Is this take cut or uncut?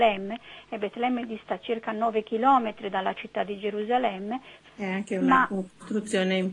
cut